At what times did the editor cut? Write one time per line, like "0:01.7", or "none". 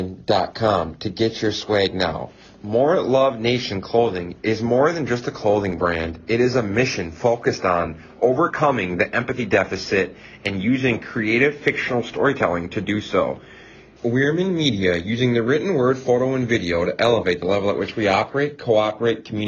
0:14.0